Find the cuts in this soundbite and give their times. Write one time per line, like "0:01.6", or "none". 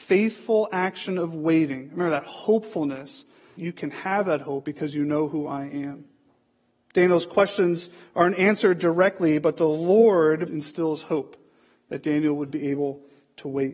0:03.6
0:10.5